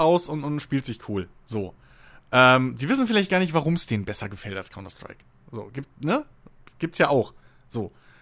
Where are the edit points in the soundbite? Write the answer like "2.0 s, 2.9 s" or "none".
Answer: none